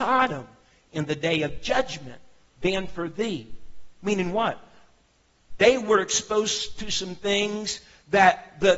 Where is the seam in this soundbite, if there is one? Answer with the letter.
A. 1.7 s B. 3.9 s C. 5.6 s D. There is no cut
C